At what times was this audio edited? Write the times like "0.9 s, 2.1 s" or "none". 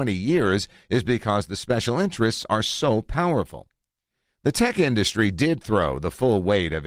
none